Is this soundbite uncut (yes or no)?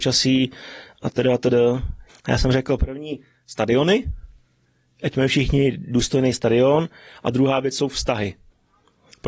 no